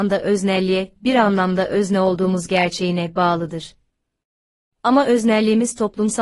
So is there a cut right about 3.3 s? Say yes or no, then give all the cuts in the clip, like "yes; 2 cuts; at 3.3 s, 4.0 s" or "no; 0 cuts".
no; 1 cut; at 4.7 s